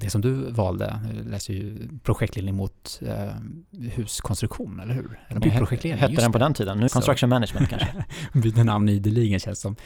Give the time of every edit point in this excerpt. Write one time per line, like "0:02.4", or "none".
0:05.4
0:06.9